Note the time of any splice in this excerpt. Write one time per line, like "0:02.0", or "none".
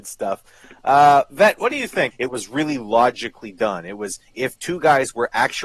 0:02.1